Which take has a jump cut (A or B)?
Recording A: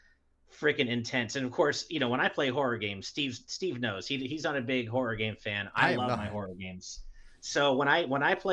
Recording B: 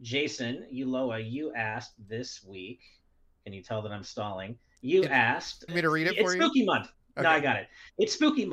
B